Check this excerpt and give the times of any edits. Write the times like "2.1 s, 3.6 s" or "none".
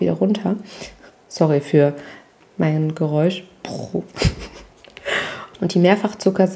5.5 s